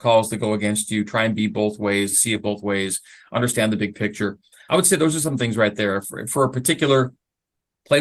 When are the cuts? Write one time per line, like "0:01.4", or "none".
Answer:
0:02.1